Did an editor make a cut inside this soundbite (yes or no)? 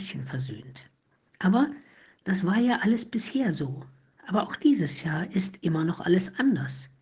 no